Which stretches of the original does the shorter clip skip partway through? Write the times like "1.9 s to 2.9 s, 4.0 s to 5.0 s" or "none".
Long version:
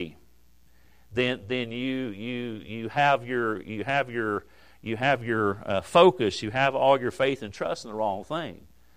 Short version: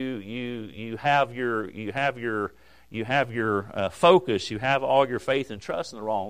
none